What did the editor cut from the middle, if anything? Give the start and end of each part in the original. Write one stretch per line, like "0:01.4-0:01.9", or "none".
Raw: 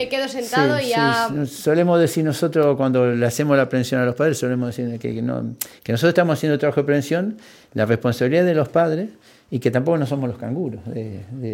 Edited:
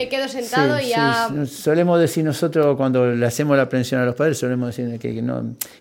none